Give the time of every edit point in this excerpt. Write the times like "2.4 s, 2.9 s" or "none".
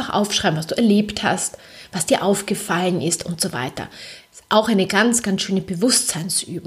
none